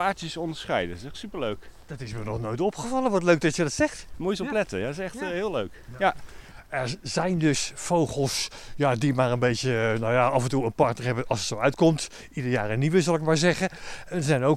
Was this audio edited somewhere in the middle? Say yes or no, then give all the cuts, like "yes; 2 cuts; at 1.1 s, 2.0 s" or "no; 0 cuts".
no; 0 cuts